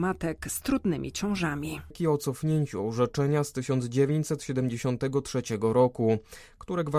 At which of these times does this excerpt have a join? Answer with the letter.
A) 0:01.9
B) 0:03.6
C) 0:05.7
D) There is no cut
A